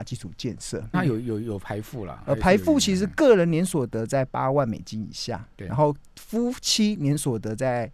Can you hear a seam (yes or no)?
yes